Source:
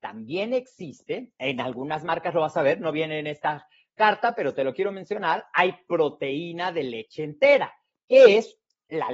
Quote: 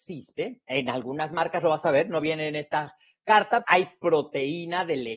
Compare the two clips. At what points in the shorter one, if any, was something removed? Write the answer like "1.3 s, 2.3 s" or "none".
3.6 s